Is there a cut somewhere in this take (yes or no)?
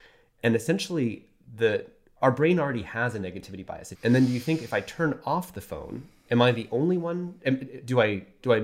yes